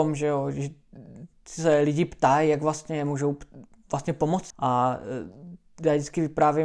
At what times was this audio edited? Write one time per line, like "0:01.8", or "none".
0:04.5